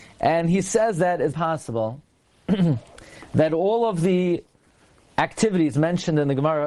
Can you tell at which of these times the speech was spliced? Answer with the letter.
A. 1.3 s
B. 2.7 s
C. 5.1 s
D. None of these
A